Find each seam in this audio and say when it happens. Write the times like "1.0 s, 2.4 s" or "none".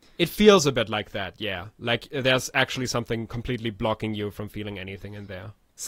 none